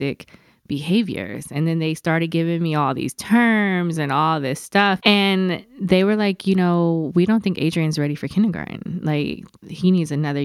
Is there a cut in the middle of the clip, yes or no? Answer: yes